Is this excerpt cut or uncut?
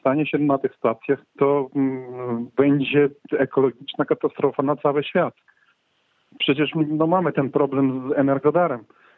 cut